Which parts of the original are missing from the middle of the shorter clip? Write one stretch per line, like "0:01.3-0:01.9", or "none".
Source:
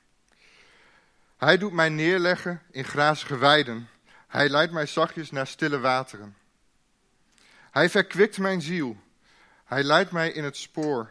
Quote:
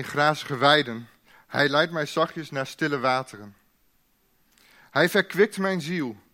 none